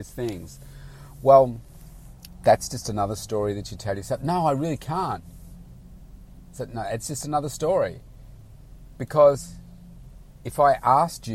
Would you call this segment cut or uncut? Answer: uncut